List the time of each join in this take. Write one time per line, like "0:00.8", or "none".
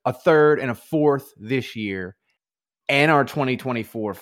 none